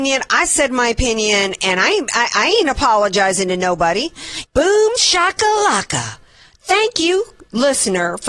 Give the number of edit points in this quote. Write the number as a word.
one